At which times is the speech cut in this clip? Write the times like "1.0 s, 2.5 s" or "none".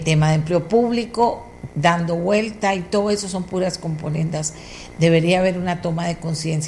1.7 s